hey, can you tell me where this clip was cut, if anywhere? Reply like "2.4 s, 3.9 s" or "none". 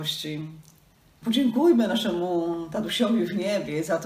1.2 s